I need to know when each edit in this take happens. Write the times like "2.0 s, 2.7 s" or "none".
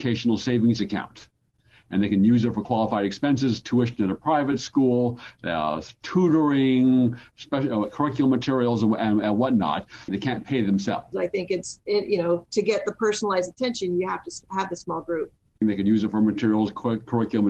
10.1 s, 11.1 s, 15.6 s